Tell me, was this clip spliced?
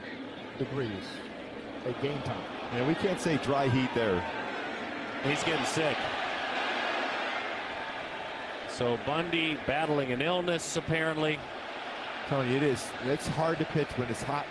yes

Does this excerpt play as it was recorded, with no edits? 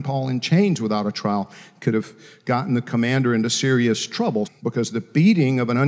no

